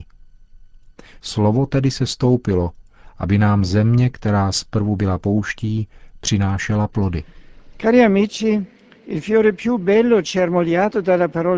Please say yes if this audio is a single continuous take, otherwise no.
no